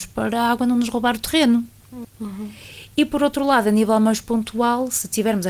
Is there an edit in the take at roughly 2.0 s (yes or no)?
yes